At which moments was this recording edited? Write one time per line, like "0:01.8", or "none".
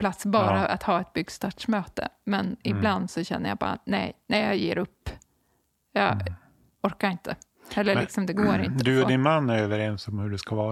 none